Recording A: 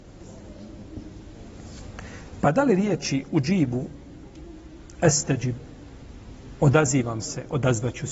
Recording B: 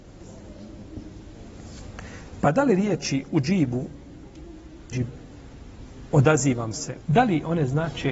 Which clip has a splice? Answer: B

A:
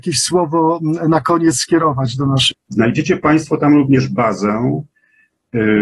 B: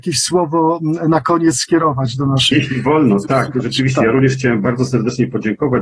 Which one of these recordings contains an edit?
A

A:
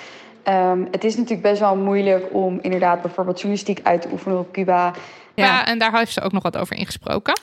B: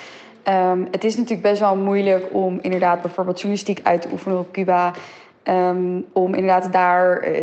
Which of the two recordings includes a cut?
A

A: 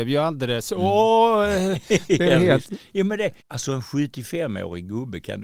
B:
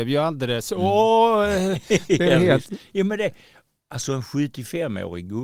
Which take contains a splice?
A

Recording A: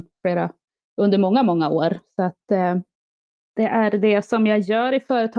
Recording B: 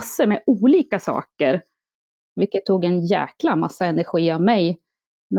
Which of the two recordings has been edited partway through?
B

